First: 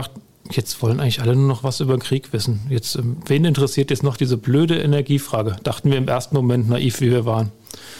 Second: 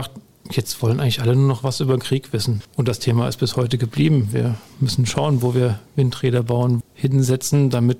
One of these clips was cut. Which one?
second; 2 cuts; at 2.6 s, 6.8 s

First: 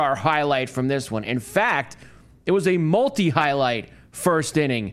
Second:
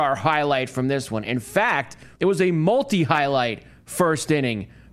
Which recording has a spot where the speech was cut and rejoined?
second; 1 cut; at 2.1 s

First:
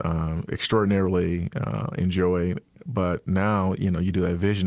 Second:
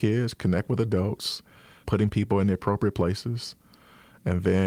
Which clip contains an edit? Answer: second; 1 cut; at 1.8 s

